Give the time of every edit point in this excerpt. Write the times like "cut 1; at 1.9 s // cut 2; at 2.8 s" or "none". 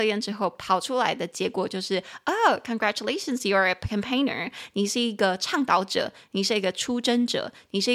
none